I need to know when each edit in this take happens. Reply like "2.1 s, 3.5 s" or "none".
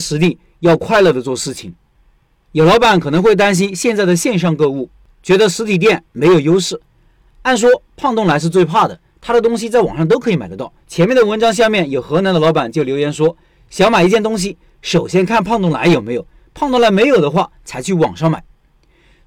10.8 s